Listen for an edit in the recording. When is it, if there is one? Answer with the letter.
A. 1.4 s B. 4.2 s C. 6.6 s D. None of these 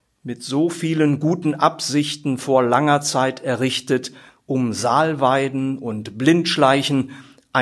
D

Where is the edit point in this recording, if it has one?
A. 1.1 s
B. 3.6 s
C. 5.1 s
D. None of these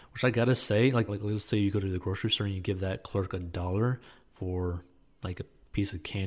A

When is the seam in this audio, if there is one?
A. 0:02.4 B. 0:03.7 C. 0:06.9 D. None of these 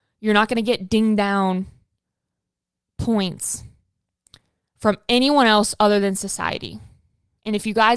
D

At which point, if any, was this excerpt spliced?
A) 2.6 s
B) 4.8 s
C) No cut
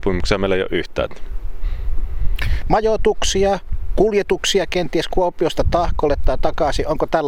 A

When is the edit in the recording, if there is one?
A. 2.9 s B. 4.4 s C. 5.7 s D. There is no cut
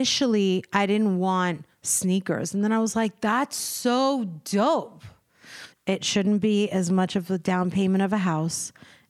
C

